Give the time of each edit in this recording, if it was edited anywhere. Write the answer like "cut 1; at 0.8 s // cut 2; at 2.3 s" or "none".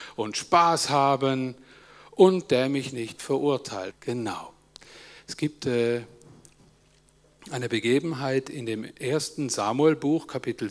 cut 1; at 3.9 s